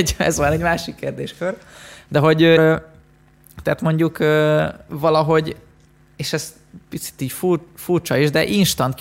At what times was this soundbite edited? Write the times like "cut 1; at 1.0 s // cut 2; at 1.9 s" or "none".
cut 1; at 2.6 s